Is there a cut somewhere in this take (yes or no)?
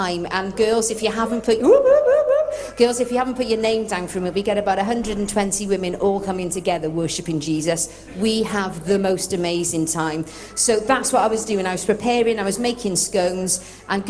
no